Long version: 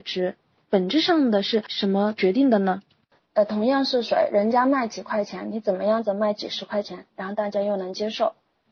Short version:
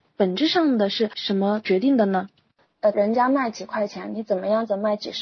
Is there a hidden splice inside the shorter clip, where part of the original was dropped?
yes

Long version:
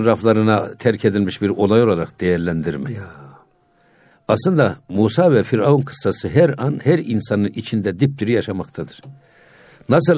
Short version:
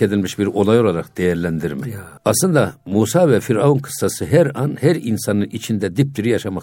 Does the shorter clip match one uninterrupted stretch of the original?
no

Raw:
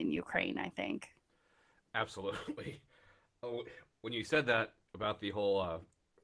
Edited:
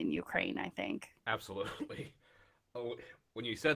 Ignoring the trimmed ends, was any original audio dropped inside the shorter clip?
yes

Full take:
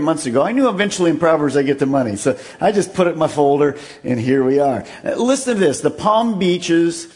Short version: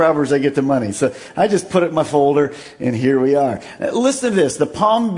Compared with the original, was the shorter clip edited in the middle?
no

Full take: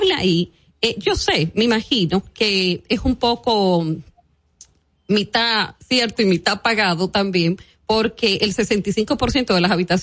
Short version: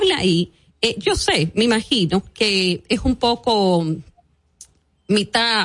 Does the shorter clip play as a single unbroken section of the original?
yes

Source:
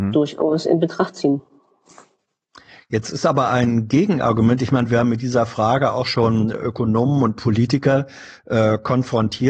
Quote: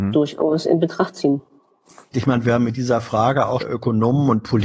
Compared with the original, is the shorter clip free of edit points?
no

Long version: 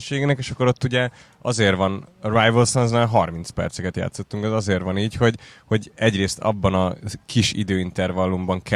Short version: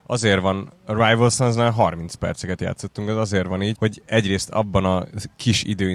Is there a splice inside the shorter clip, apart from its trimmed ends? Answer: yes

